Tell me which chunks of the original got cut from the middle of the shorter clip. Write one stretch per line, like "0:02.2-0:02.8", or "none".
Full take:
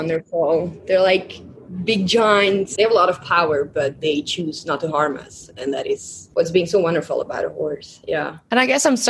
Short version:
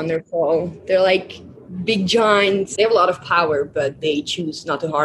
none